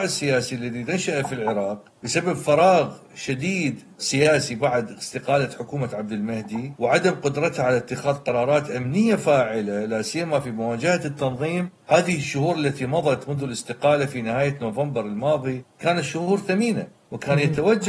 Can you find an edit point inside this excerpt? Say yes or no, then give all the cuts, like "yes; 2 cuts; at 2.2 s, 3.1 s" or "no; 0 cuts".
no; 0 cuts